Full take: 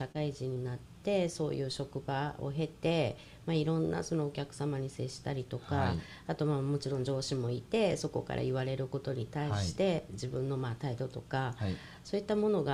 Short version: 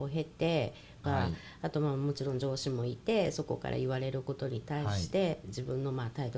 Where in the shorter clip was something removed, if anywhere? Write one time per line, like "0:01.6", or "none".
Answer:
0:01.0